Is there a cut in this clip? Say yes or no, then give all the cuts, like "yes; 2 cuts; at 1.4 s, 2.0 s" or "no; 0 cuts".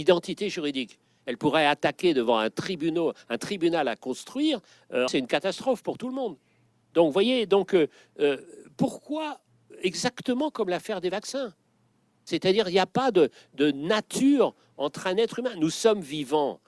yes; 1 cut; at 5.1 s